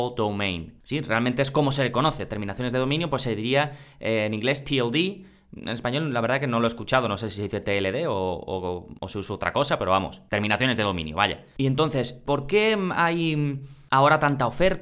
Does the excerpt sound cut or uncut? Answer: uncut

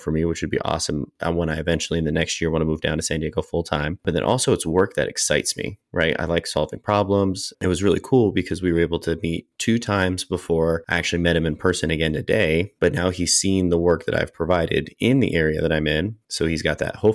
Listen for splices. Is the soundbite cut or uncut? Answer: cut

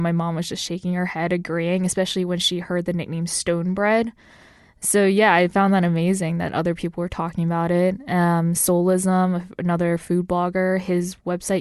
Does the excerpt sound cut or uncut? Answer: uncut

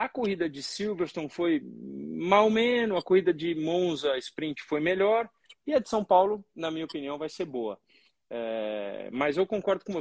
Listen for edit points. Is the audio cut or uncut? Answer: uncut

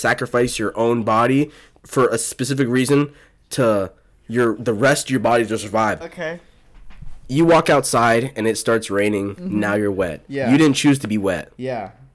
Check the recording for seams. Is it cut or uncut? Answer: cut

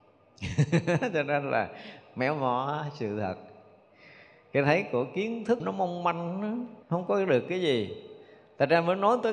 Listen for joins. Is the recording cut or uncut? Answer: cut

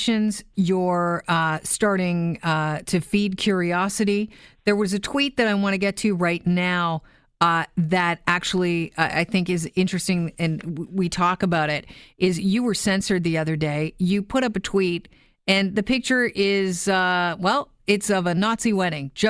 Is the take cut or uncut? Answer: uncut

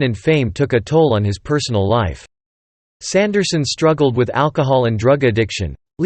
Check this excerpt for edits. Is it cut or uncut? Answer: uncut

